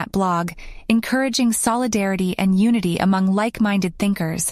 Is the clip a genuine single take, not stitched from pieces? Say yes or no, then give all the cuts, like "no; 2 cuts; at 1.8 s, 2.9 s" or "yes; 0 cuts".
yes; 0 cuts